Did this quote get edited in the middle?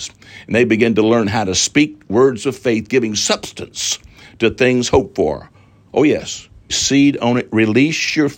yes; 1 cut; at 6.7 s

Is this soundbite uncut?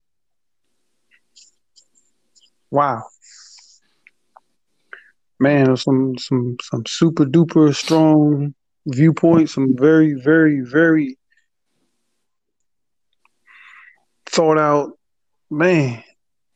yes; 0 cuts

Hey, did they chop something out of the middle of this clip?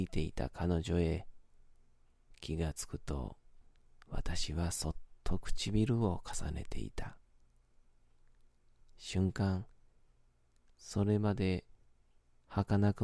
no; 0 cuts

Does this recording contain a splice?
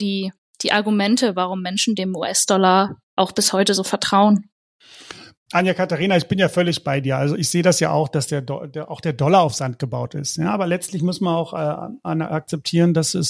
no; 0 cuts

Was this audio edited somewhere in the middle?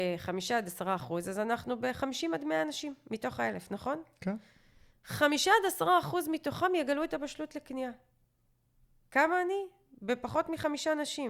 no; 0 cuts

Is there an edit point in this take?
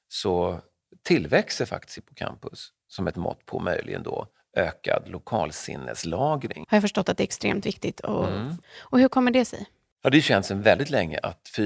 yes; 2 cuts; at 6.6 s, 8.6 s

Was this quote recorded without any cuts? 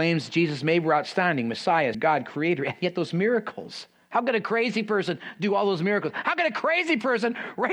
no; 1 cut; at 1.9 s

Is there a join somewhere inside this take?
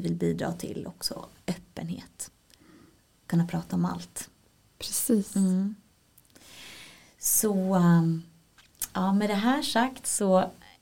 no; 0 cuts

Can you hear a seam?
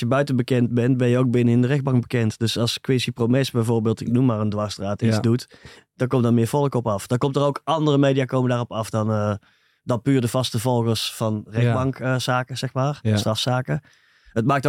no; 0 cuts

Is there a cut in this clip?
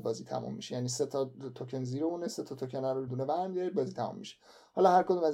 yes; 1 cut; at 3.1 s

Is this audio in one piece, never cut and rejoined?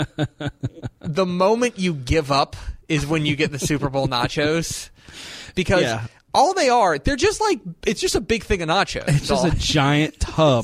yes; 0 cuts

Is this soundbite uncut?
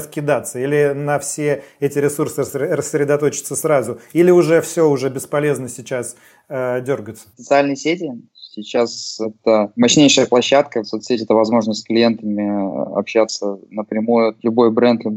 no; 2 cuts; at 7.3 s, 10.8 s

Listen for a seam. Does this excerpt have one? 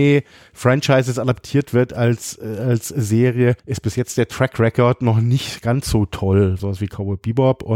yes; 2 cuts; at 3.6 s, 6.6 s

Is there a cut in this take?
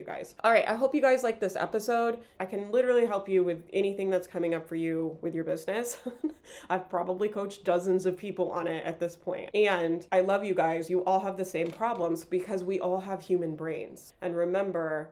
yes; 3 cuts; at 2.4 s, 9.5 s, 14.1 s

